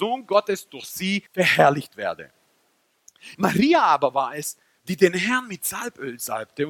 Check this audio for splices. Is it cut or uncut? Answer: cut